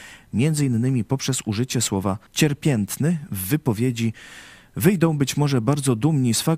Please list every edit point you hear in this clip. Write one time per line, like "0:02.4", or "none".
0:02.3